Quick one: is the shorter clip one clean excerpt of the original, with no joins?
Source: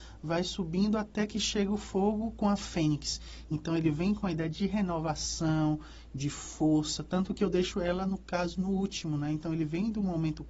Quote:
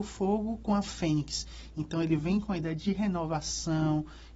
yes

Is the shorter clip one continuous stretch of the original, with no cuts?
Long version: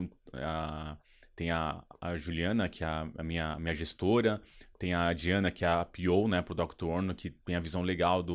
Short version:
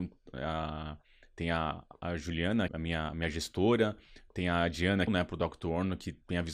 no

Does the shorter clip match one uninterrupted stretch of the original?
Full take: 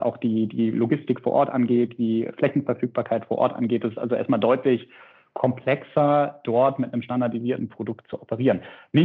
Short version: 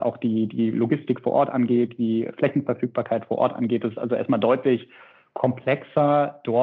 yes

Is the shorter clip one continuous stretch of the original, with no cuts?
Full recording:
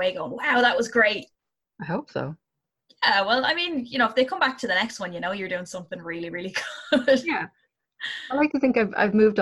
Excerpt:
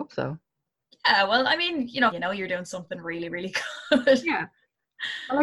no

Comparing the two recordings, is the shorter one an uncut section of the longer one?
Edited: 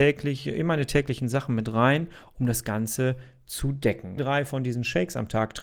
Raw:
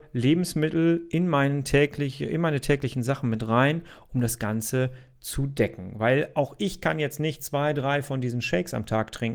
no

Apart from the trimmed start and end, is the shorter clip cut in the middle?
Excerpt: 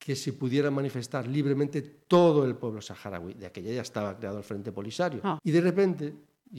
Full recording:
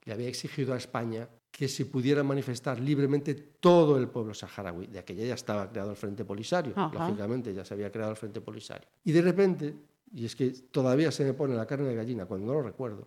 yes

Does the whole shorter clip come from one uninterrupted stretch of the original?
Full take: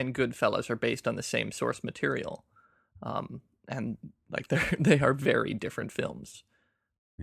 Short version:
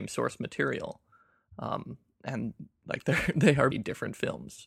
no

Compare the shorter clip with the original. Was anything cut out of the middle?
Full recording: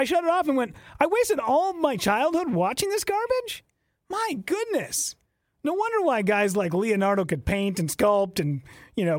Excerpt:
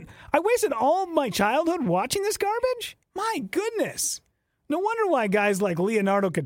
yes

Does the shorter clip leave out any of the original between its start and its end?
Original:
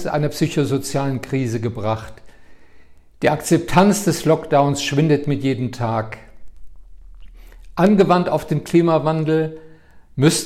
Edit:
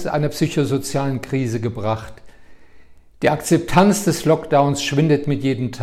no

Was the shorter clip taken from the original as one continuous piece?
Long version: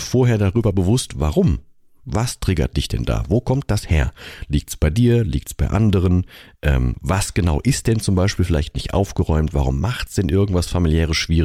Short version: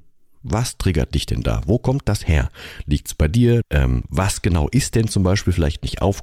no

